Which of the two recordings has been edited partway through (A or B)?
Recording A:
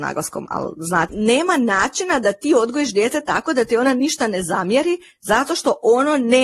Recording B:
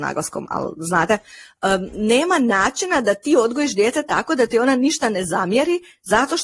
A